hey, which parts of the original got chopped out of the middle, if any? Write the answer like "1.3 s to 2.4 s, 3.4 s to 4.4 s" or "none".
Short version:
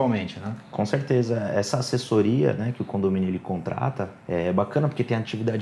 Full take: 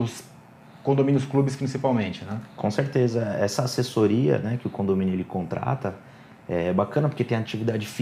6.0 s to 6.4 s